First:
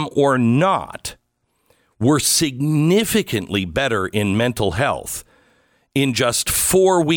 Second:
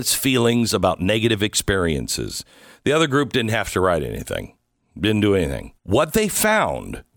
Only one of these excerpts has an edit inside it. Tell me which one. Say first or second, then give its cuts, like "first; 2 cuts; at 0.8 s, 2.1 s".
second; 1 cut; at 5.8 s